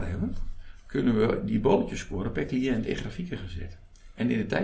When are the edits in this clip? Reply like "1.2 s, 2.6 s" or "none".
none